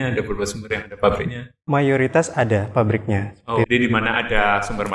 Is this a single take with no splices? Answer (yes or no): no